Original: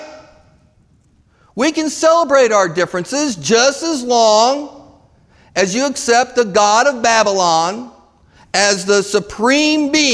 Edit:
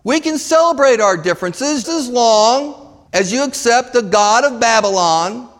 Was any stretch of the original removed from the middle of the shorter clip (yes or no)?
yes